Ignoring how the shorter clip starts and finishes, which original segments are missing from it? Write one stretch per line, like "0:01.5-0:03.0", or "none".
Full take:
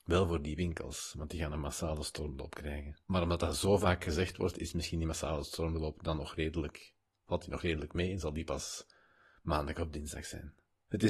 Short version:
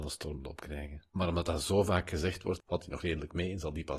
0:04.5-0:07.2